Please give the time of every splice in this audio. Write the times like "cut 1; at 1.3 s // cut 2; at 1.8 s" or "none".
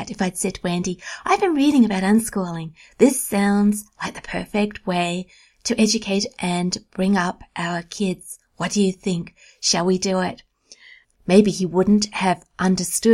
cut 1; at 11.0 s